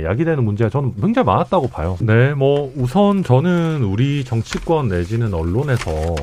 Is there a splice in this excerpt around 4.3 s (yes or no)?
no